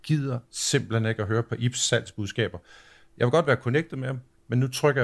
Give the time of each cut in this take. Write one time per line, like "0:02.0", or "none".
none